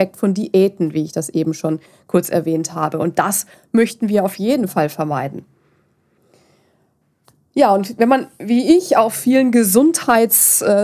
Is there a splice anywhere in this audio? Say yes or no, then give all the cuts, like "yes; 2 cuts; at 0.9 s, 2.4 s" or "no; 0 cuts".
no; 0 cuts